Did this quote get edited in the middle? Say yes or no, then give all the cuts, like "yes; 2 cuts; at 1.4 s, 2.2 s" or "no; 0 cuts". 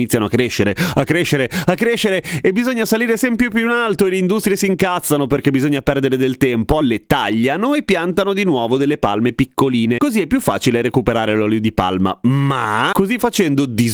yes; 1 cut; at 6.8 s